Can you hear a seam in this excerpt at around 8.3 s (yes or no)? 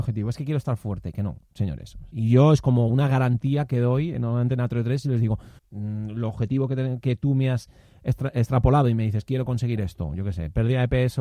no